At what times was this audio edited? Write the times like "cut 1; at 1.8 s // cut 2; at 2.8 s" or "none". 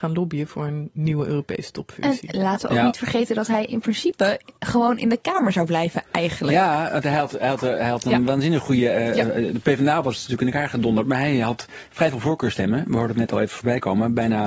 cut 1; at 4.6 s